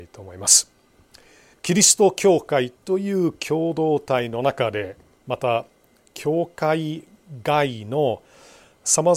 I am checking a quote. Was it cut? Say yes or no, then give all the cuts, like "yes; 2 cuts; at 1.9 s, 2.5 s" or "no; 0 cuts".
yes; 1 cut; at 1.5 s